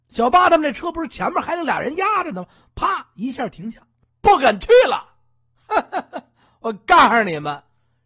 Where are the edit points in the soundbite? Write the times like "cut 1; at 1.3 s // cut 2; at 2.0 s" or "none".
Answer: cut 1; at 4.1 s

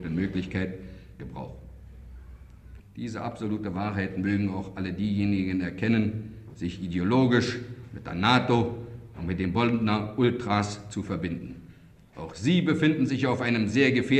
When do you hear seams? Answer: cut 1; at 1.2 s // cut 2; at 2.8 s // cut 3; at 6.5 s

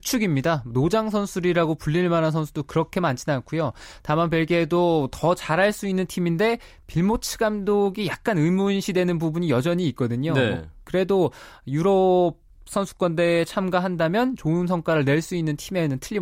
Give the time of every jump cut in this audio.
none

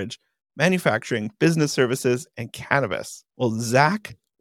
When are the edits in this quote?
none

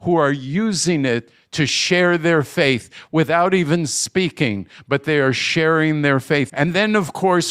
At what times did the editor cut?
cut 1; at 6.5 s

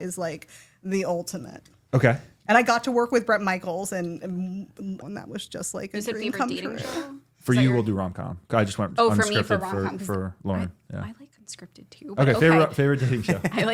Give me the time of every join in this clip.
cut 1; at 5.0 s

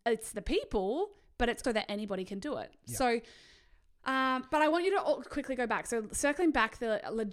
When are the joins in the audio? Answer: cut 1; at 1.6 s

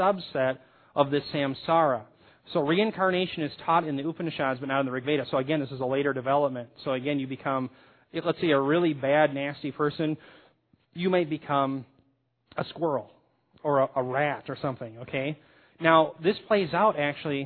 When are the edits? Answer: none

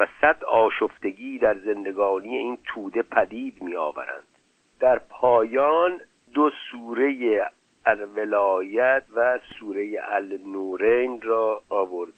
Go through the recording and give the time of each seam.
cut 1; at 4.6 s // cut 2; at 9.1 s

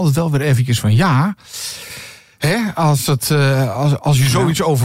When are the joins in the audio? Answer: none

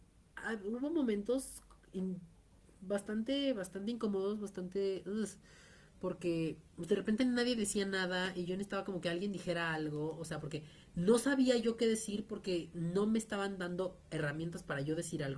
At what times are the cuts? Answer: cut 1; at 6.7 s

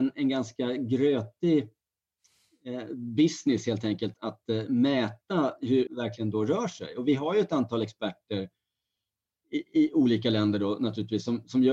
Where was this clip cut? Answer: cut 1; at 4.1 s // cut 2; at 5.9 s

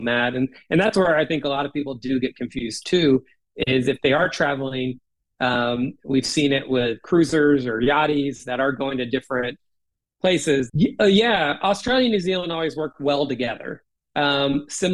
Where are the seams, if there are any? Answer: cut 1; at 10.7 s

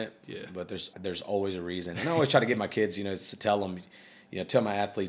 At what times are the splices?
cut 1; at 0.9 s

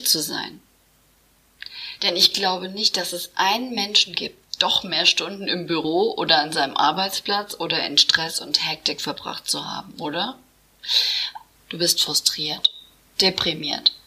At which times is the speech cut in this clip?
cut 1; at 2.0 s // cut 2; at 4.4 s // cut 3; at 11.5 s

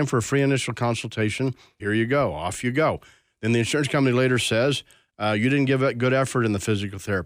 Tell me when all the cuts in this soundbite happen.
cut 1; at 1.8 s

